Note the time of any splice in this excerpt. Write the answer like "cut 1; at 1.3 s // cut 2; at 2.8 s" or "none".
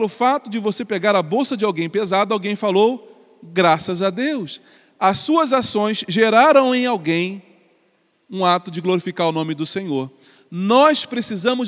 none